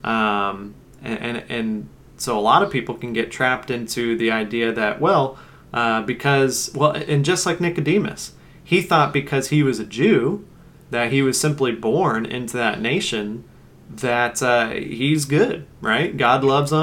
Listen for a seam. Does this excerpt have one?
no; 0 cuts

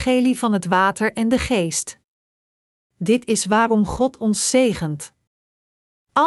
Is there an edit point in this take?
no; 0 cuts

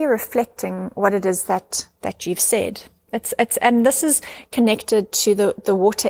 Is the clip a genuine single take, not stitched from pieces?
yes; 0 cuts

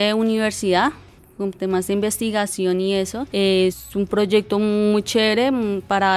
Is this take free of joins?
no; 1 cut; at 3.3 s

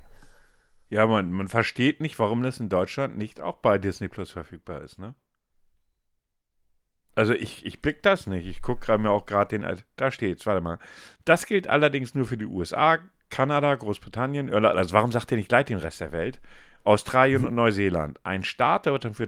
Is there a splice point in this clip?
no; 0 cuts

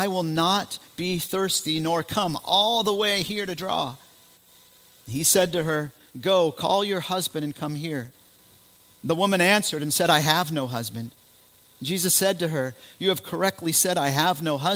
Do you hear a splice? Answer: no; 0 cuts

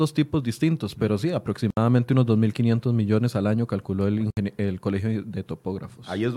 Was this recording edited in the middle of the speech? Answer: no; 0 cuts

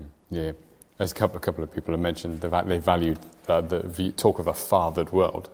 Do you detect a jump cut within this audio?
no; 0 cuts

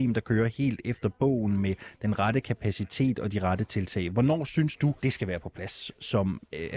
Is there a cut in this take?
yes; 1 cut; at 5.0 s

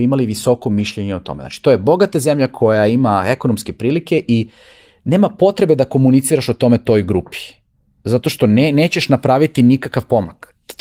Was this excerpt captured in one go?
yes; 0 cuts

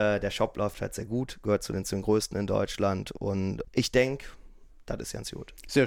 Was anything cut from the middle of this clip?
yes; 1 cut; at 3.6 s

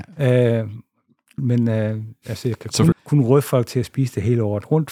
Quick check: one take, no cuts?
no; 2 cuts; at 1.4 s, 2.9 s

